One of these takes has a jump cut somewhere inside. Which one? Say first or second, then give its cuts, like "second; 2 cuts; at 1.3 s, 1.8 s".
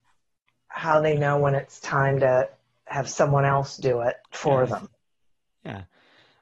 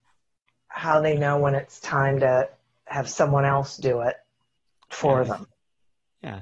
first; 1 cut; at 4.2 s